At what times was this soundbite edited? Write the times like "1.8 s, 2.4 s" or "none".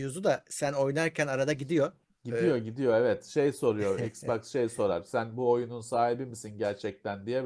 2.1 s